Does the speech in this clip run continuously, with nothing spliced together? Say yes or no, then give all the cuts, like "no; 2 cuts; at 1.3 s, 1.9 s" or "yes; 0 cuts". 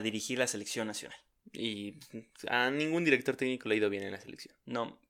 yes; 0 cuts